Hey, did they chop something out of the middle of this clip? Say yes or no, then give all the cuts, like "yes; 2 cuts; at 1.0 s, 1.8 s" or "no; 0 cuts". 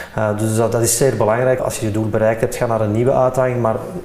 yes; 1 cut; at 1.6 s